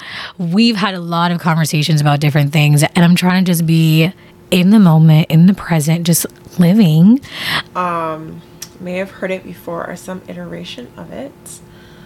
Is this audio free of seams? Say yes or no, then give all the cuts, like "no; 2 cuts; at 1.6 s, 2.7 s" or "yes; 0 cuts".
no; 2 cuts; at 2.9 s, 7.7 s